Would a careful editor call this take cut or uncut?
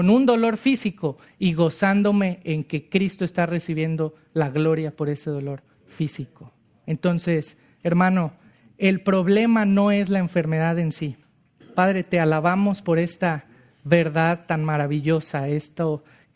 cut